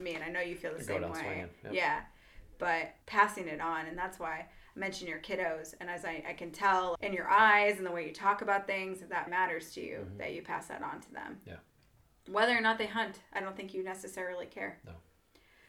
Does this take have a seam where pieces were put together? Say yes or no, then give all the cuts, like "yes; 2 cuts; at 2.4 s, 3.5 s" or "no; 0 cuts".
yes; 3 cuts; at 3.0 s, 6.9 s, 9.3 s